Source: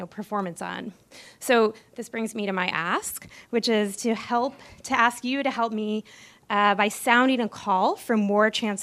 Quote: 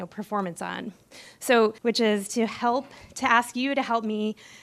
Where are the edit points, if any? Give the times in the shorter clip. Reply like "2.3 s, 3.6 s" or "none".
1.8 s